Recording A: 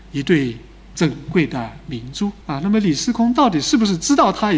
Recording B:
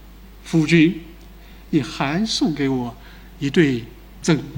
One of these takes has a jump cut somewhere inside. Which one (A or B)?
A